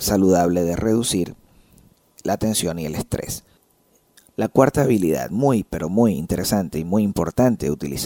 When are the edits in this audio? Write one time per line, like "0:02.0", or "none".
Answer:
none